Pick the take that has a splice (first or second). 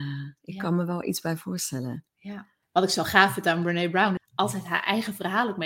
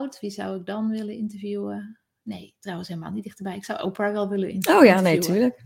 first